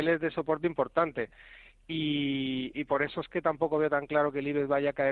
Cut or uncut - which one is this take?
uncut